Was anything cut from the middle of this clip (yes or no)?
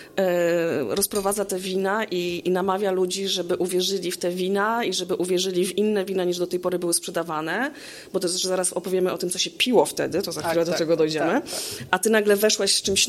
no